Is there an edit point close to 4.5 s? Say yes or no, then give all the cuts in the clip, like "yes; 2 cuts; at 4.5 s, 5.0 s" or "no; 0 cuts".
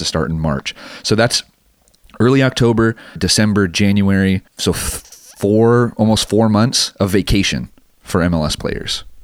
yes; 2 cuts; at 3.2 s, 4.5 s